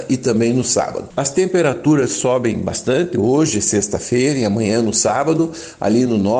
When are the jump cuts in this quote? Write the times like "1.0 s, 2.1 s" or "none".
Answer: 1.1 s